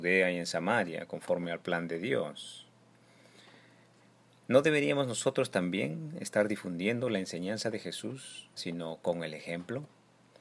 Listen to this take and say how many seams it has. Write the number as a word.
one